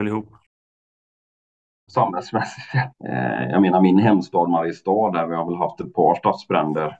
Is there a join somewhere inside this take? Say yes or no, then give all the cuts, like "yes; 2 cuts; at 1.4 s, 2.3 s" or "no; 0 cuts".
yes; 2 cuts; at 1.9 s, 2.9 s